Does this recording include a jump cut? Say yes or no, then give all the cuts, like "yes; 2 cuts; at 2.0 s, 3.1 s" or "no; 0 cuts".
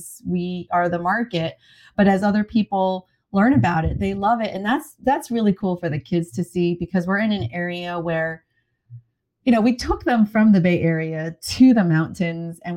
no; 0 cuts